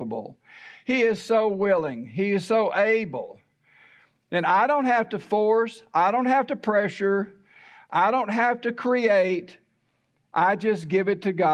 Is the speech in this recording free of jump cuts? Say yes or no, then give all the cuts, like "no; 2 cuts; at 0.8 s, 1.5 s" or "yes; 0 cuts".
yes; 0 cuts